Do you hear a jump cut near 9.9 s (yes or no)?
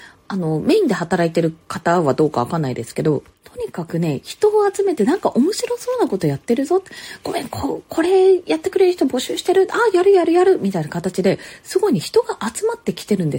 no